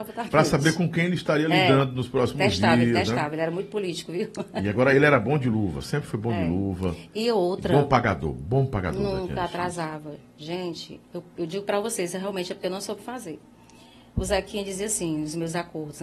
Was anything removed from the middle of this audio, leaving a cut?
yes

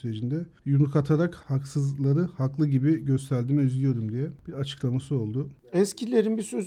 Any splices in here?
no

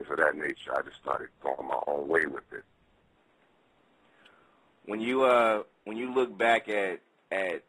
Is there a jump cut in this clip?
no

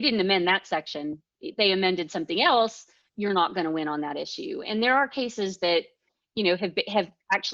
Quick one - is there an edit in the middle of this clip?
no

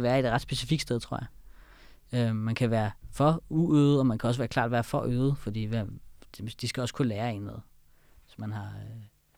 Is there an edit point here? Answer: no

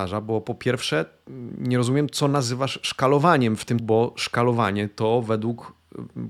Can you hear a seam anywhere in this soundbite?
yes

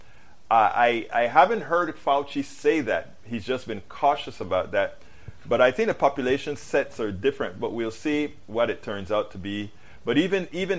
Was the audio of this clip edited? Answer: no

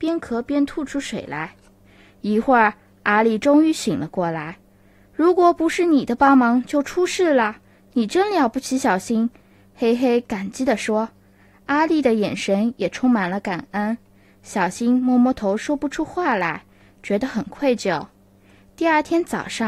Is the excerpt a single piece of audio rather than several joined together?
yes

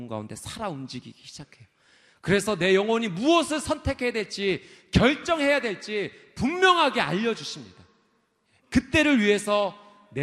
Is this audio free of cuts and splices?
yes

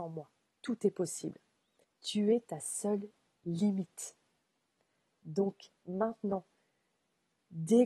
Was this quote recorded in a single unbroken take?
no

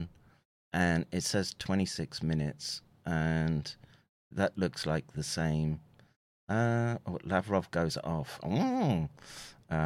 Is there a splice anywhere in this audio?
no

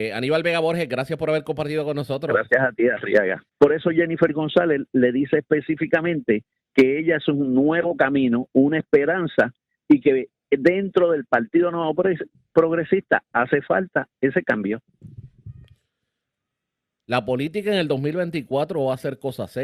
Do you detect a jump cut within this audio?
yes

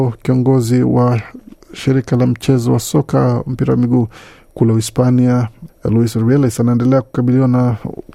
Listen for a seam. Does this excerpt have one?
yes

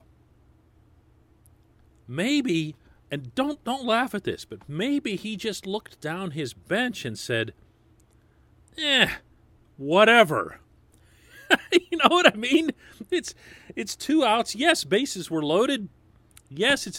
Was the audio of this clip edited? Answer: no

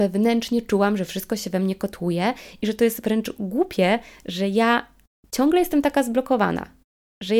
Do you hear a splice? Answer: no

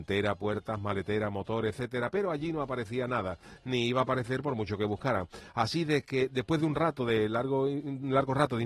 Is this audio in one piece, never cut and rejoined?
yes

